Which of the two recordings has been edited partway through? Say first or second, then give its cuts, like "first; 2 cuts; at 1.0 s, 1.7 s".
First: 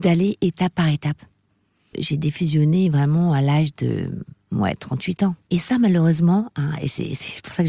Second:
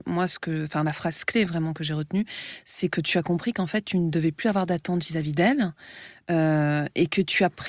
first; 2 cuts; at 1.9 s, 5.5 s